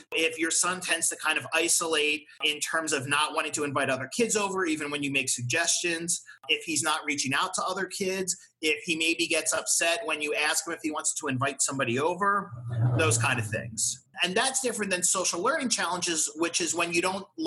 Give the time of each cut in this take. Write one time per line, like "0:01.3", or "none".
0:14.1